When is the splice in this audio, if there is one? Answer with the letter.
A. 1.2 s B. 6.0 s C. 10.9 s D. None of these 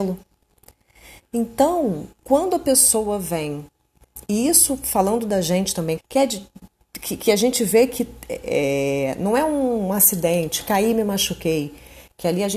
B